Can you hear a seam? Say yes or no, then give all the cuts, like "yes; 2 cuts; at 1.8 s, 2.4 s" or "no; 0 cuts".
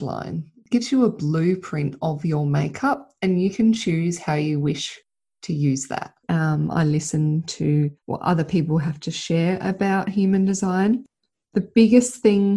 yes; 2 cuts; at 6.2 s, 8.0 s